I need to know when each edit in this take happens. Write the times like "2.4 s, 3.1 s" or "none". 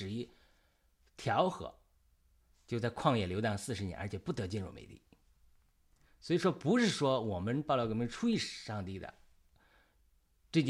none

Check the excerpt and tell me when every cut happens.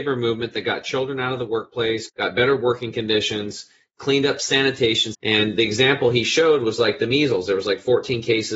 2.1 s, 5.1 s

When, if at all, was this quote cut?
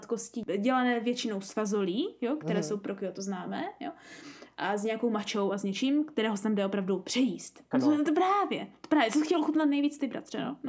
7.7 s

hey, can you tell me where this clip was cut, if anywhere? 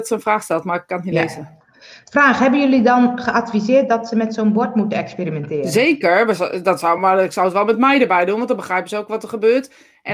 none

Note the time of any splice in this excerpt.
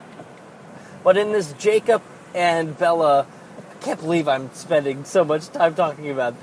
none

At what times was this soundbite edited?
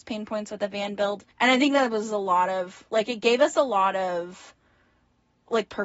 1.3 s

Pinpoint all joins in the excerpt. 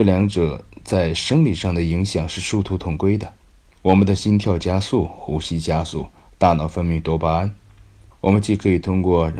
8.1 s

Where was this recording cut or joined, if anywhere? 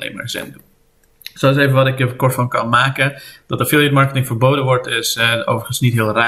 none

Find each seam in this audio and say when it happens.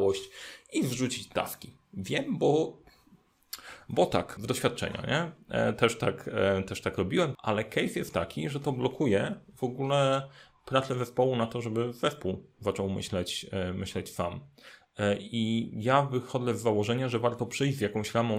4.4 s, 7.3 s

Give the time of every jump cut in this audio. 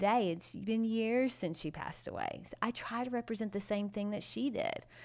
none

